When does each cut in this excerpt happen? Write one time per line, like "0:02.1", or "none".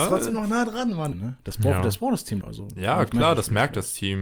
0:01.1
0:02.4